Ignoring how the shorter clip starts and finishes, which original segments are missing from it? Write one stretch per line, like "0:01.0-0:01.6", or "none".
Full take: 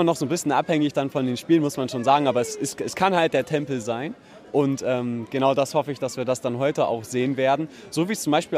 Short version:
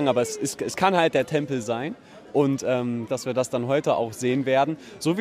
0:05.3-0:06.0